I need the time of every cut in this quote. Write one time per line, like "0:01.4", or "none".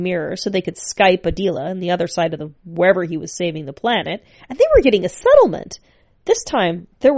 0:04.4